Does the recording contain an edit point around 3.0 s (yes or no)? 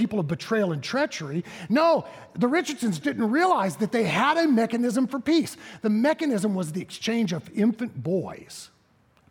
yes